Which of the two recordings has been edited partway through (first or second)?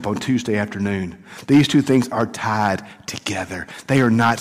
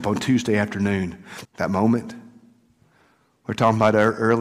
second